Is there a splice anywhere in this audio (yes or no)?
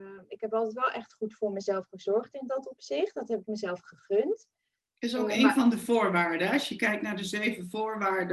no